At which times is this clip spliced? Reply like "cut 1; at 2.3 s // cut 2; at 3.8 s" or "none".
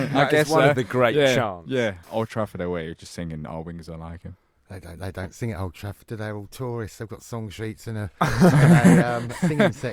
cut 1; at 2.0 s